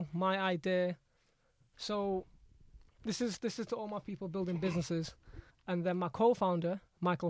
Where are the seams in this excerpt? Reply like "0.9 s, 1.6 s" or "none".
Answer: 1.7 s, 5.5 s